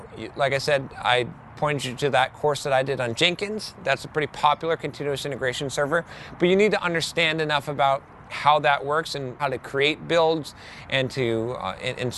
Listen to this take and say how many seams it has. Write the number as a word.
one